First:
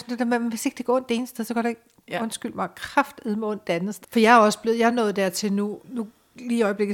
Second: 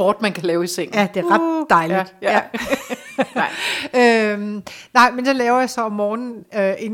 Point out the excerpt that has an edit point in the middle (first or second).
first